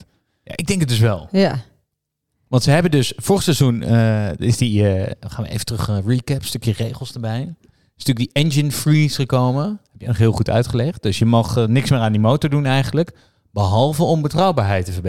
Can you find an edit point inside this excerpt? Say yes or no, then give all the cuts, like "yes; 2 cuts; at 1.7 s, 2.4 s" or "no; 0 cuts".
no; 0 cuts